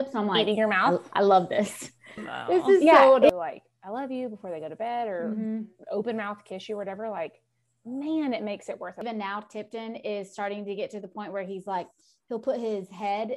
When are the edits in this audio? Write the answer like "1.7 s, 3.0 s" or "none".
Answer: 2.2 s